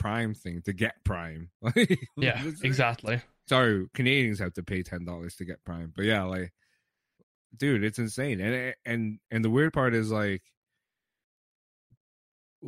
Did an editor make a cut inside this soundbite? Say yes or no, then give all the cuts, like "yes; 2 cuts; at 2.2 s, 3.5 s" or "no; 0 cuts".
yes; 1 cut; at 3.5 s